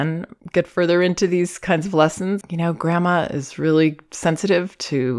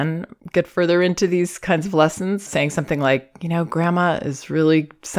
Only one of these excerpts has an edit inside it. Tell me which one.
first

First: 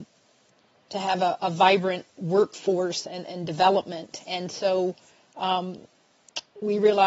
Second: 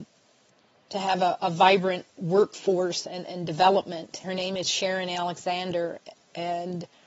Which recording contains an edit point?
second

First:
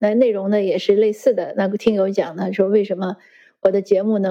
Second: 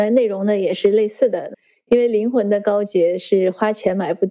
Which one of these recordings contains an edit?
second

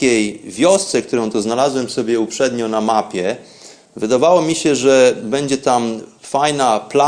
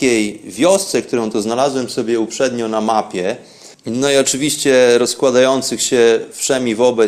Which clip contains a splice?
second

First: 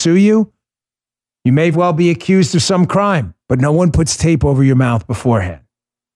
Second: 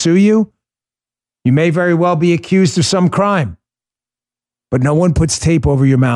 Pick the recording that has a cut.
first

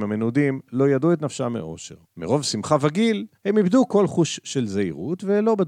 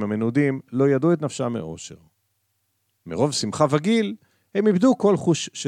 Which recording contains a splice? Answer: first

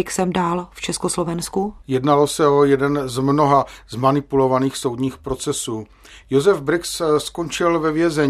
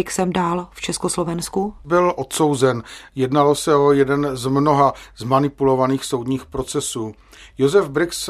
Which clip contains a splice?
first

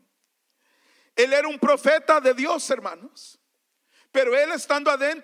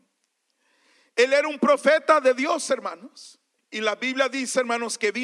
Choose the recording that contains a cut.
second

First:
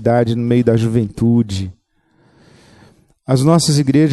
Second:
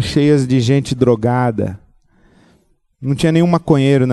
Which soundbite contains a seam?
second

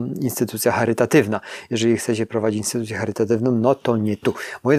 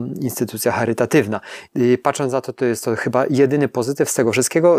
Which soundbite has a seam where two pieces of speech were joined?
second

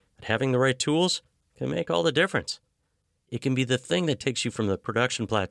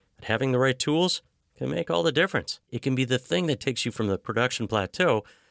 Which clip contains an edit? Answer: second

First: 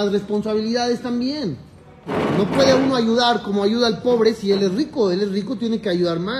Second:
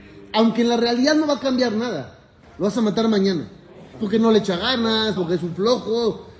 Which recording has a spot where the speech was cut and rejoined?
second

